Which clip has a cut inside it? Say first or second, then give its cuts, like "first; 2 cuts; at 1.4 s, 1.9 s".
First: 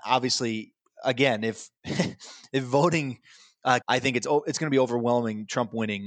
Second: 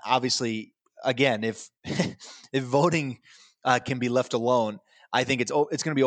first; 1 cut; at 3.8 s